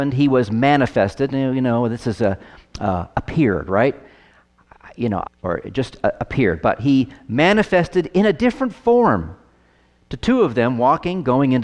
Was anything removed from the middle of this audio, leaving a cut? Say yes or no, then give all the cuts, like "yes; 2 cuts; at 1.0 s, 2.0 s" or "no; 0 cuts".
yes; 1 cut; at 5.2 s